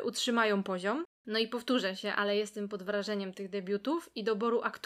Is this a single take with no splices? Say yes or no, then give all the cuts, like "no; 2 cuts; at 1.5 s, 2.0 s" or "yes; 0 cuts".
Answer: yes; 0 cuts